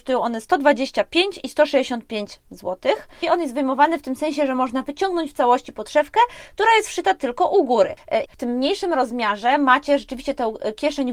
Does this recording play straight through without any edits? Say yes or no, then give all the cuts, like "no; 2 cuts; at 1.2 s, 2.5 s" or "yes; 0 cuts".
no; 2 cuts; at 3.2 s, 8.3 s